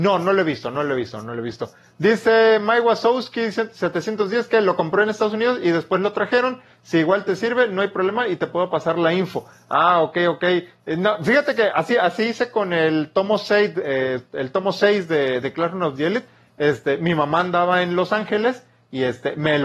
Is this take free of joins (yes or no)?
yes